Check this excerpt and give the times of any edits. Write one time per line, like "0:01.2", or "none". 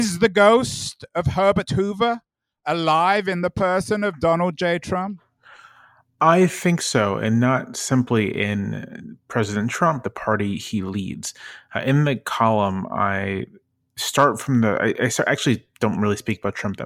0:10.0